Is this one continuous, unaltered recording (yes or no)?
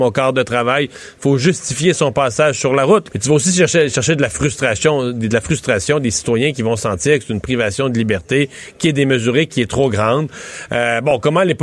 no